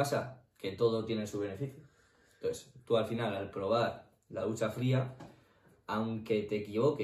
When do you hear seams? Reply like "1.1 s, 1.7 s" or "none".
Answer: none